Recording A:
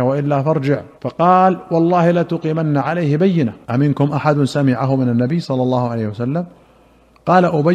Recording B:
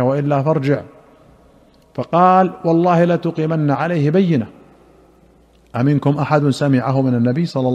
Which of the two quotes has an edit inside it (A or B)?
A